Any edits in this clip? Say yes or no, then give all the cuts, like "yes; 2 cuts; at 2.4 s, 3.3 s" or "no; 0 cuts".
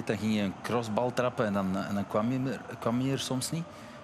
no; 0 cuts